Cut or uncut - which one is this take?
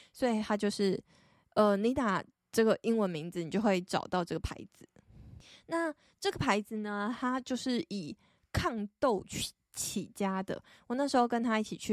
uncut